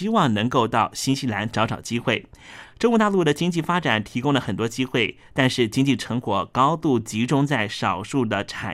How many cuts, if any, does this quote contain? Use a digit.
1